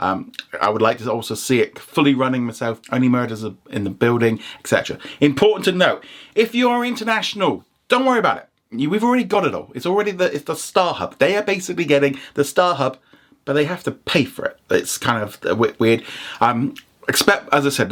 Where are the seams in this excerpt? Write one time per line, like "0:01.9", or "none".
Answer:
0:02.8